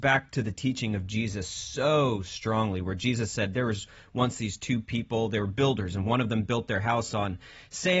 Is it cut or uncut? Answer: uncut